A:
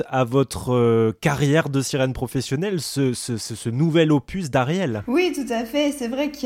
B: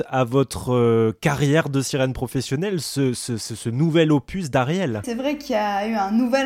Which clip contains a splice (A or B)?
B